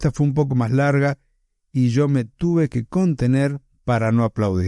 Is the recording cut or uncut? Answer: uncut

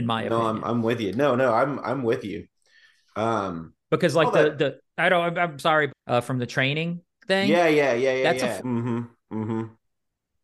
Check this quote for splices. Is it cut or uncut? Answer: cut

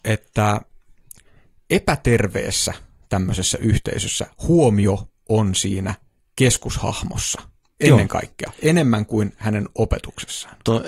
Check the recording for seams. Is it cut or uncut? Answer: uncut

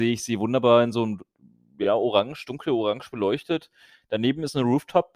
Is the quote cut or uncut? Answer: uncut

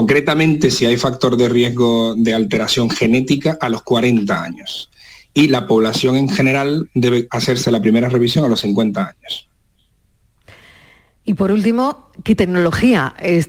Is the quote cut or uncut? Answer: uncut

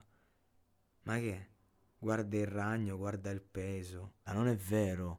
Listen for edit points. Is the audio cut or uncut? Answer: cut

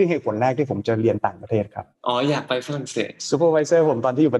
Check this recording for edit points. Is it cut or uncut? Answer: cut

